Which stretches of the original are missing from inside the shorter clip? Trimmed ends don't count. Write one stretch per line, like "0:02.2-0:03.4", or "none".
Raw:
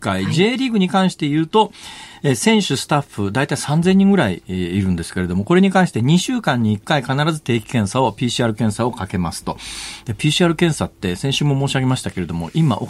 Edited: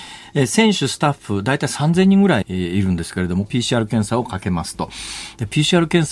0:04.3-0:04.4
0:05.5-0:08.1